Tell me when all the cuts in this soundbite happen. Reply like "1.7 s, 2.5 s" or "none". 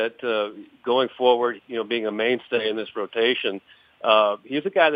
1.6 s